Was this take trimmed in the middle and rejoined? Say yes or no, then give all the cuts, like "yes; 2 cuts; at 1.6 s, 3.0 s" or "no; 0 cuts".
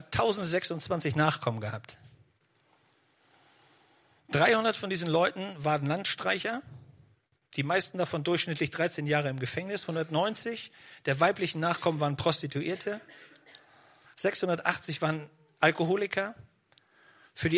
no; 0 cuts